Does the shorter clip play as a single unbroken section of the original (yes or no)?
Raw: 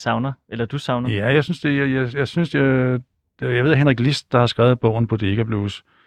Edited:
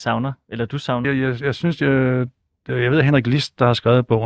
no